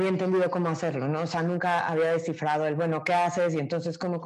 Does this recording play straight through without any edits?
yes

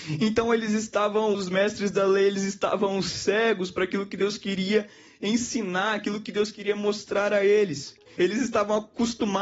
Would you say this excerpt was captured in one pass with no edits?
no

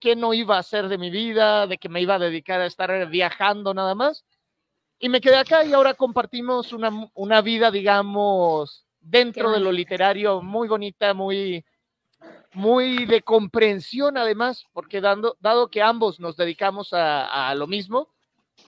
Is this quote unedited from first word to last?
yes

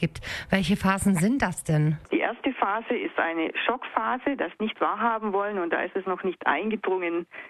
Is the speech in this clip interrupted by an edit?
yes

